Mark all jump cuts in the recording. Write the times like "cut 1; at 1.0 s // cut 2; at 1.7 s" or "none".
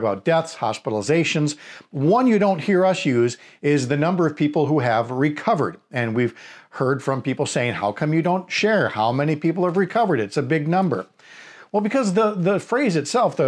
none

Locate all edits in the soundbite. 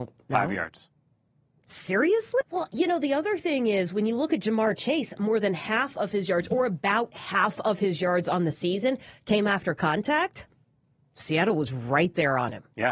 cut 1; at 2.4 s

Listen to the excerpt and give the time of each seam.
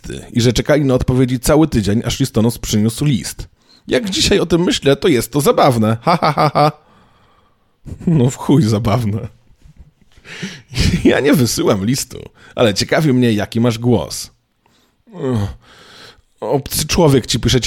none

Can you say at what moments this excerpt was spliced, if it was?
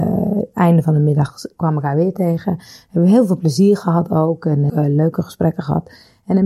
cut 1; at 4.7 s

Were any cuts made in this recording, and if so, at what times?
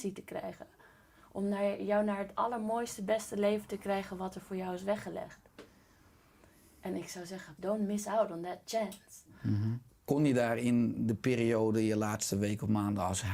cut 1; at 7.6 s // cut 2; at 9.9 s

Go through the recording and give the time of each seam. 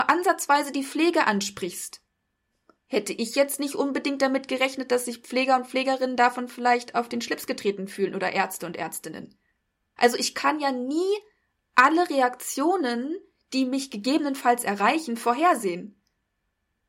cut 1; at 10.0 s

